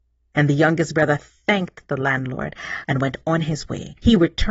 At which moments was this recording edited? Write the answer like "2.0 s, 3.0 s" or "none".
2.8 s